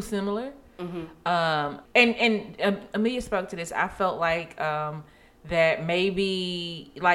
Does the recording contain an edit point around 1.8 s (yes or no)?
yes